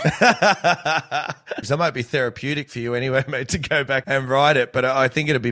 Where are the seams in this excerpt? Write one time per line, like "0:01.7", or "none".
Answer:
0:01.6
0:04.0